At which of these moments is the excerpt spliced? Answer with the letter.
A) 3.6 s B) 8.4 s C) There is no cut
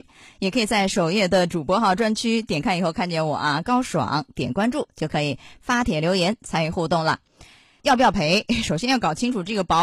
C